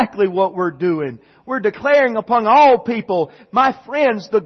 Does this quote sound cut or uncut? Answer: uncut